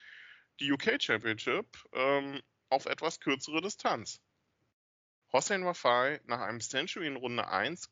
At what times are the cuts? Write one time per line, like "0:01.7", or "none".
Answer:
0:05.2